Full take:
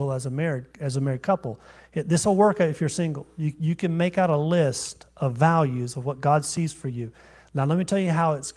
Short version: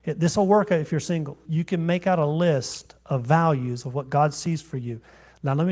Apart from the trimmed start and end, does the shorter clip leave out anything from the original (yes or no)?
yes